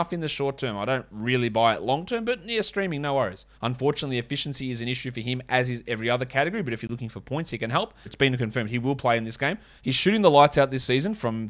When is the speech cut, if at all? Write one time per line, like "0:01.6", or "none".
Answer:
0:03.5
0:08.1
0:09.8

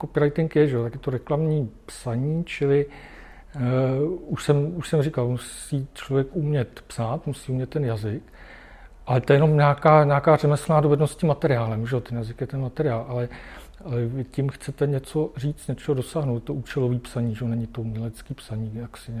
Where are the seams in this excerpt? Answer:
none

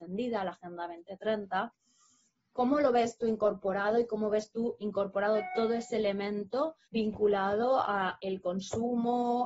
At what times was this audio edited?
0:04.8
0:06.8

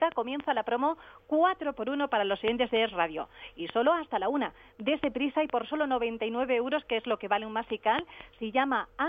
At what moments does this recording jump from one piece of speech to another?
none

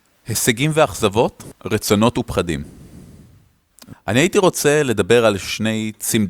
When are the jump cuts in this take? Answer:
0:01.5
0:03.9

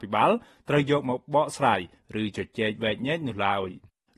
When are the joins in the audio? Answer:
none

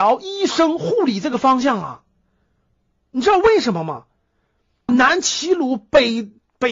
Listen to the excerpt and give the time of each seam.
0:04.9

